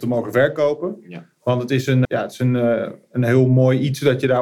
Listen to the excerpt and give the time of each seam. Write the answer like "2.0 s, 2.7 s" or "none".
2.1 s